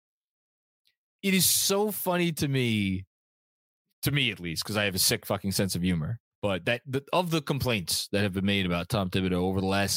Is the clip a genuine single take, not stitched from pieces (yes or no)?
no